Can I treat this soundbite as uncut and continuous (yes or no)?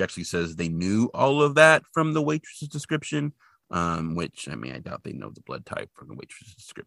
yes